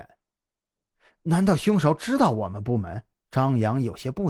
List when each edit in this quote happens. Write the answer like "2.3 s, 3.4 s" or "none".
3.2 s